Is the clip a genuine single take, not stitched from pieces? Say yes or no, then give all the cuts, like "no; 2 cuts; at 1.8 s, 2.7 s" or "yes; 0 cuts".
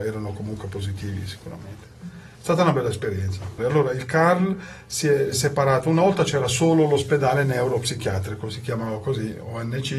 no; 2 cuts; at 3.6 s, 5.3 s